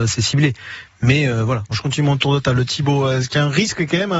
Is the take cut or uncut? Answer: cut